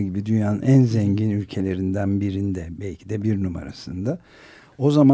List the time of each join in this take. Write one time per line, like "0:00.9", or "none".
none